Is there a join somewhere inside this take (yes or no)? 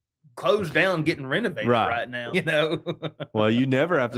yes